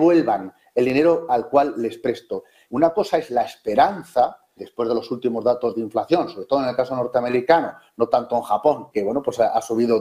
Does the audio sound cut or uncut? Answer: cut